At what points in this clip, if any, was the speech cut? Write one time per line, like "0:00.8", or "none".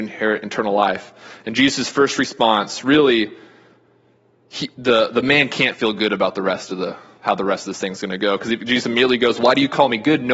none

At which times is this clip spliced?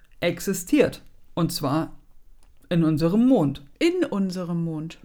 0:03.7

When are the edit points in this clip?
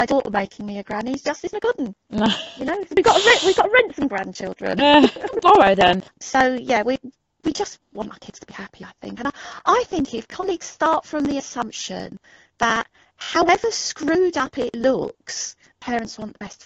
none

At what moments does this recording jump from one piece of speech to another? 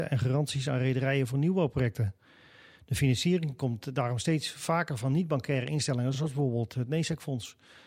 none

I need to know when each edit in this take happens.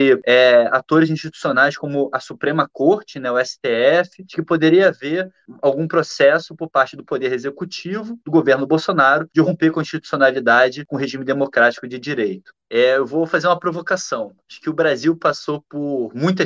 0:12.5

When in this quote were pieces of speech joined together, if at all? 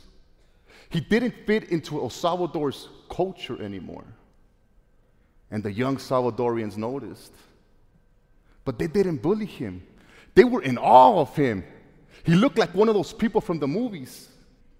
none

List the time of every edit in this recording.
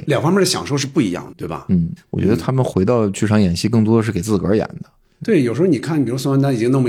0:01.3

